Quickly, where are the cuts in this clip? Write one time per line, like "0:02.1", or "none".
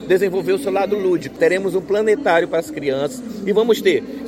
0:01.4